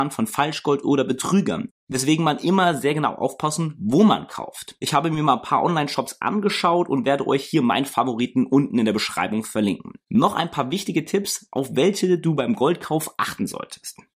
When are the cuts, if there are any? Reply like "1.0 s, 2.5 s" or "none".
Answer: none